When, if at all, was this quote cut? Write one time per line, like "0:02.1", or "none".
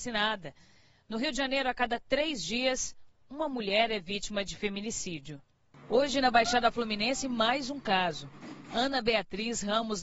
none